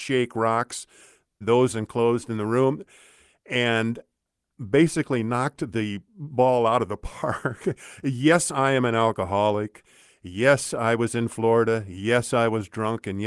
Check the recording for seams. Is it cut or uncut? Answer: cut